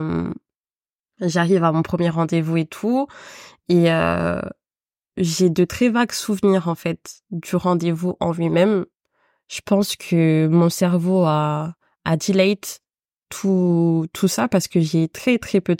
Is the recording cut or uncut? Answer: uncut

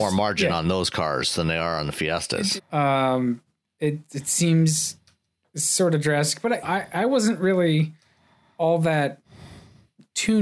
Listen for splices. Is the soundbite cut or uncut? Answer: cut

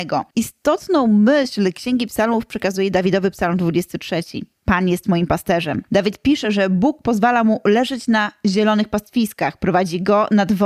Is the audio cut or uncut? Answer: uncut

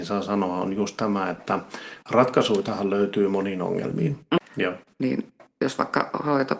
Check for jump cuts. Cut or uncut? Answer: cut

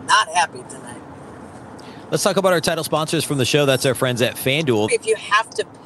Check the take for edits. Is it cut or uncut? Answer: cut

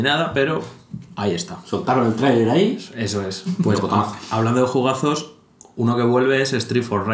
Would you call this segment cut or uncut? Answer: cut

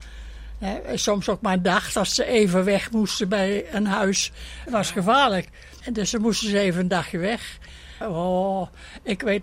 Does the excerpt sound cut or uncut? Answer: cut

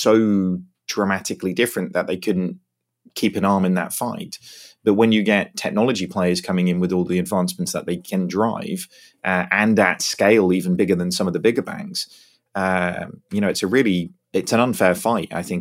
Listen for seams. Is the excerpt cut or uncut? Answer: uncut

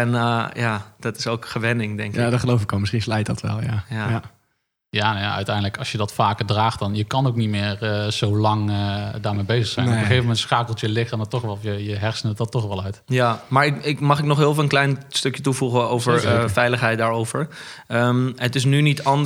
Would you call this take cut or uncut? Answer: uncut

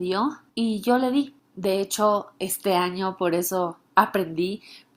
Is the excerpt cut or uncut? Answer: cut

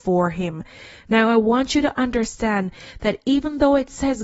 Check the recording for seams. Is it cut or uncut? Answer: uncut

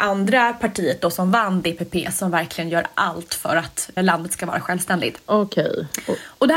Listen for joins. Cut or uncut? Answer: cut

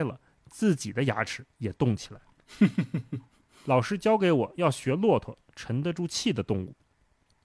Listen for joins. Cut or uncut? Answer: uncut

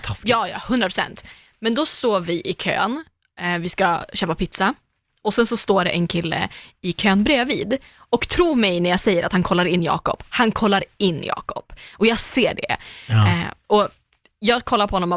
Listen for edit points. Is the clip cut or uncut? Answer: uncut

